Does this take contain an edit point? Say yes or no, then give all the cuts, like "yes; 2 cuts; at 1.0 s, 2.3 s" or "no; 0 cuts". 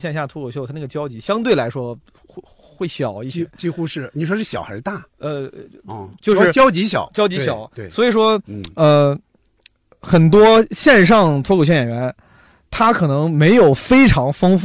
yes; 1 cut; at 6.2 s